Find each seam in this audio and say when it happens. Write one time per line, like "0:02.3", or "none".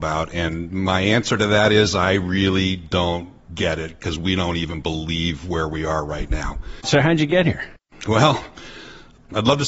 0:03.5